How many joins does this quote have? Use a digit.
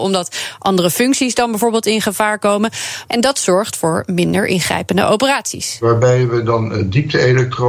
1